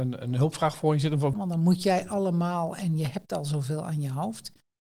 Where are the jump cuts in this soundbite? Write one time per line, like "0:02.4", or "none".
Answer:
0:01.3